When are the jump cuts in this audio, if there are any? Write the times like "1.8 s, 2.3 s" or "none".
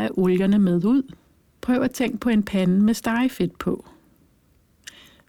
1.6 s